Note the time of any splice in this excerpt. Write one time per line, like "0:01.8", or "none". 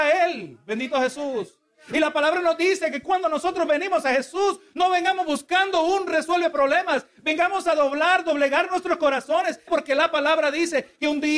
0:09.7